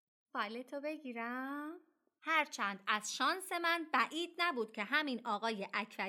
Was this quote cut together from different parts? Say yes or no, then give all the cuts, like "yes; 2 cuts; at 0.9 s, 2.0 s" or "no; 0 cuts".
yes; 1 cut; at 2.2 s